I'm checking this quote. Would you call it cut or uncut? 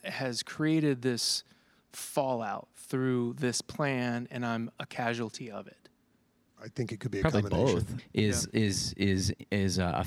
cut